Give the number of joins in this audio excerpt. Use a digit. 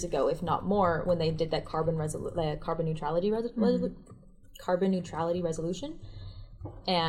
0